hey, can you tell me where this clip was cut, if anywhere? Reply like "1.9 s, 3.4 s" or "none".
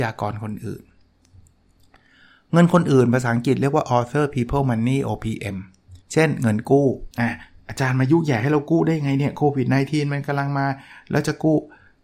6.0 s, 7.1 s